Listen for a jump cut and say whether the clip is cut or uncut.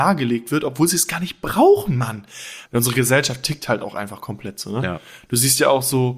cut